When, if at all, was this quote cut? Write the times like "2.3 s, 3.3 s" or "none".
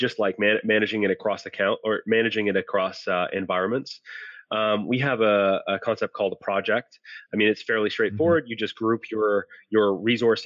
none